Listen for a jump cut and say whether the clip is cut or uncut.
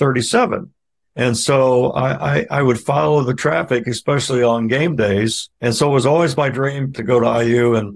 cut